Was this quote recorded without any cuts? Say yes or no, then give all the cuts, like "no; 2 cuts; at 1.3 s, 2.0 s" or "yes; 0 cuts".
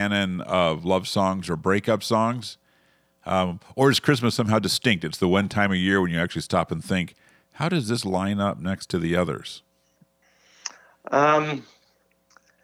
yes; 0 cuts